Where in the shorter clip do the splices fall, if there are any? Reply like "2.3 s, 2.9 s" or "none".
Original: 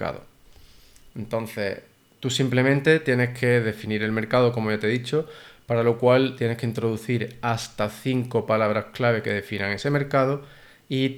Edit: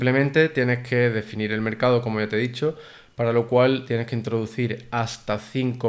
none